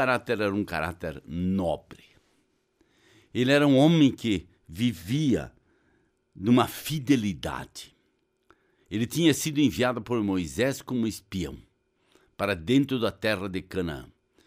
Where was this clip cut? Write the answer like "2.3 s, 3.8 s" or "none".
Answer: none